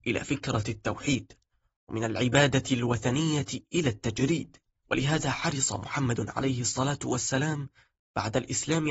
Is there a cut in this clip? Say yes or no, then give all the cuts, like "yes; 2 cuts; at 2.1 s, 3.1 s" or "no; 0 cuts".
no; 0 cuts